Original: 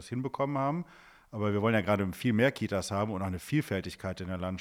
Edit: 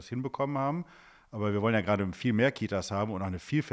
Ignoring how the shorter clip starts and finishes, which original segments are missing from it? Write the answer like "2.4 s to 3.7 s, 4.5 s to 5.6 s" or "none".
none